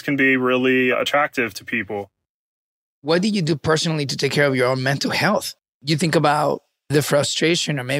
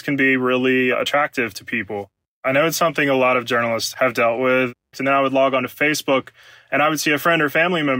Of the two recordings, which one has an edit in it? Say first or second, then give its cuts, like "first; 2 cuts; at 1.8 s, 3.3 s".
second; 2 cuts; at 2.3 s, 4.9 s